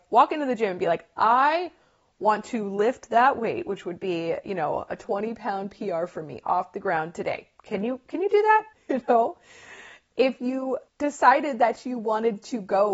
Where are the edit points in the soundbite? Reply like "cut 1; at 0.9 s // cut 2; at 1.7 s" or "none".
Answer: cut 1; at 8.7 s // cut 2; at 10.9 s